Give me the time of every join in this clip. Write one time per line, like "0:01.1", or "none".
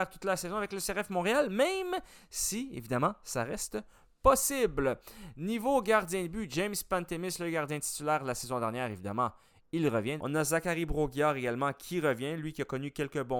0:10.2